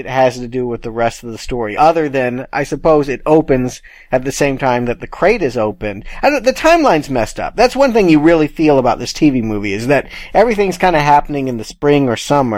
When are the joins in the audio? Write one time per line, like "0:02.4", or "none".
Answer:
none